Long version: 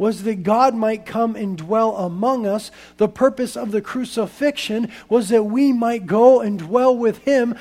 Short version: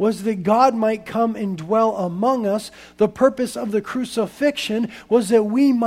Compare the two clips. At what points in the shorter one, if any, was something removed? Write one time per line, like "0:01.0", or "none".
none